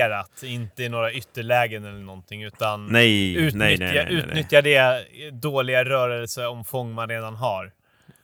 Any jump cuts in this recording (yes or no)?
no